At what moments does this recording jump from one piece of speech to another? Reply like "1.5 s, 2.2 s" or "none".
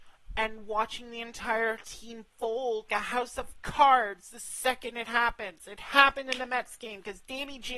2.9 s